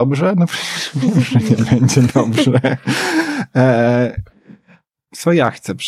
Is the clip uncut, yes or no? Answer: yes